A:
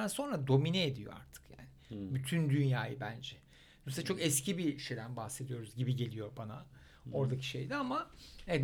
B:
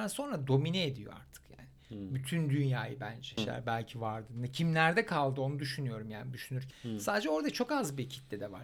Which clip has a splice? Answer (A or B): B